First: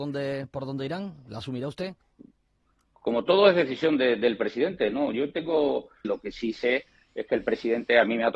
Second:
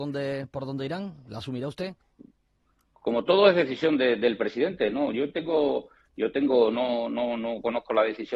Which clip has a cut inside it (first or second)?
first